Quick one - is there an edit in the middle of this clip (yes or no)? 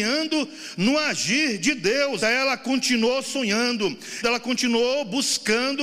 yes